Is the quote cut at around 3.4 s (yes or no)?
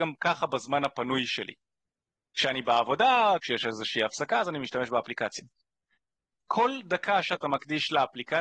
yes